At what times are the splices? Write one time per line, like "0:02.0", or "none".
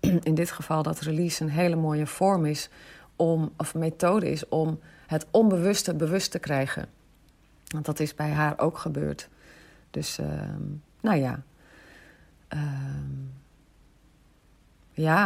none